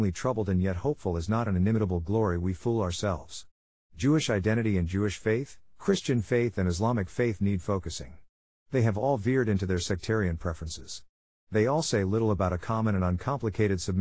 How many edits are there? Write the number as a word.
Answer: zero